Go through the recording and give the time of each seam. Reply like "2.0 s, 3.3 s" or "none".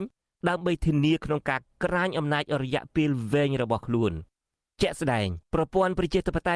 5.4 s